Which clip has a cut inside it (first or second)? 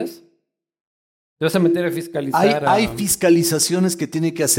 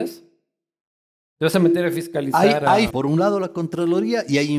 second